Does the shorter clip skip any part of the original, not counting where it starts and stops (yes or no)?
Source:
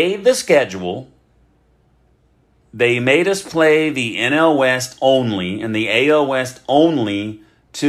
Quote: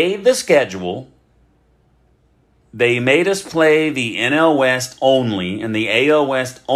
no